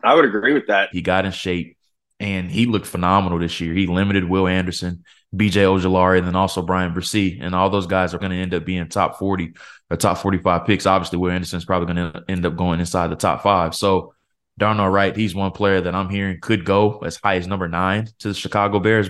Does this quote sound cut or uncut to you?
cut